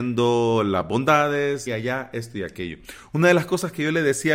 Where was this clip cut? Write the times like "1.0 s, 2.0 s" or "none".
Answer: 1.7 s